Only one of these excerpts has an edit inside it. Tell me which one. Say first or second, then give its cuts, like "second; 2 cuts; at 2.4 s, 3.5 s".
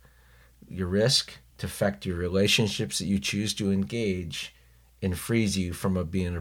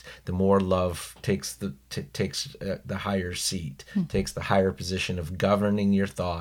first; 1 cut; at 1.5 s